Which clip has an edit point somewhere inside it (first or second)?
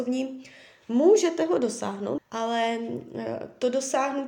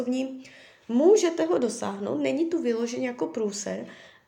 first